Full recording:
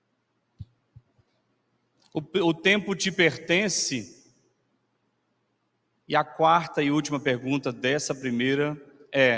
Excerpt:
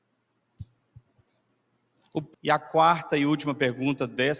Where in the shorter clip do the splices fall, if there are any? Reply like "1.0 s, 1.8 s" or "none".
2.3 s